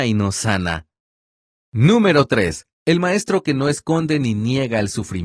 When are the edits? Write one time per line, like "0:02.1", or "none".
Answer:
0:02.7